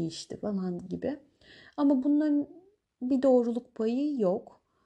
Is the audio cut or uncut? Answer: uncut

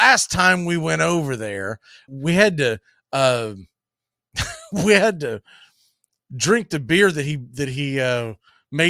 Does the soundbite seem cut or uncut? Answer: cut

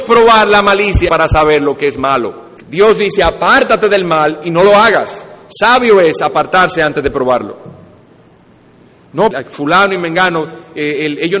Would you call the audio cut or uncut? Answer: cut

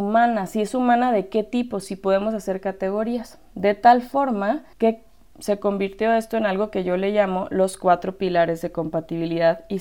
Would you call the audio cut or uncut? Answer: cut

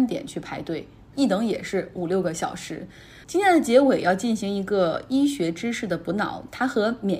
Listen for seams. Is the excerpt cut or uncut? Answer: cut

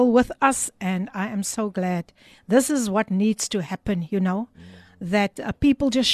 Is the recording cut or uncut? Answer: uncut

